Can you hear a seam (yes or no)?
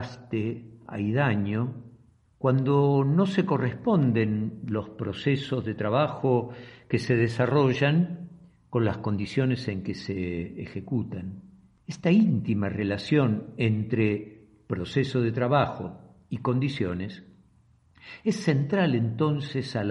no